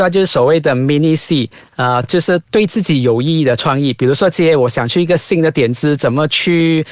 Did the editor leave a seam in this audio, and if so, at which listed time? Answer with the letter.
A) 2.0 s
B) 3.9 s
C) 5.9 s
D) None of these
D